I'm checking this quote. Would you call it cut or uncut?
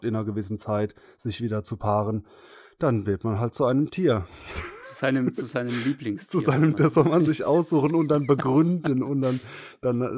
uncut